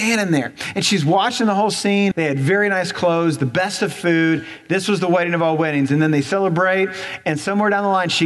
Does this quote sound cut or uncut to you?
cut